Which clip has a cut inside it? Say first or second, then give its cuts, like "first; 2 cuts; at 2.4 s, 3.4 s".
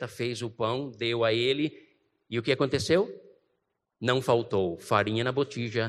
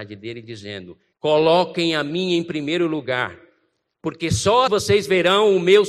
second; 2 cuts; at 1.1 s, 4.7 s